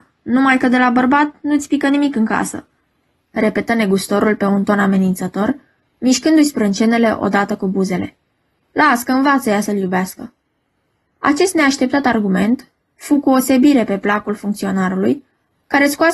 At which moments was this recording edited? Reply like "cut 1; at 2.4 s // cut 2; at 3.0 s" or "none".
cut 1; at 3.2 s